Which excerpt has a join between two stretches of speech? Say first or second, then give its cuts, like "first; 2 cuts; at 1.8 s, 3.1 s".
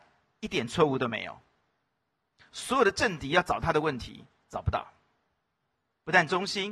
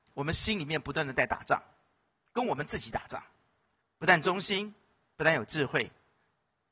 second; 1 cut; at 3.8 s